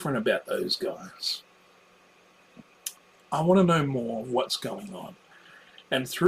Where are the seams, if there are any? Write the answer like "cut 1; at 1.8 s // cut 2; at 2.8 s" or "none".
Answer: none